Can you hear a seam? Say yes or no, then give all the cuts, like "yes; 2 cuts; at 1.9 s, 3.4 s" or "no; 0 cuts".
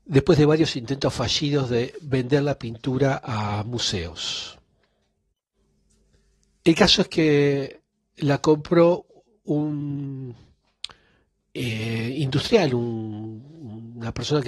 no; 0 cuts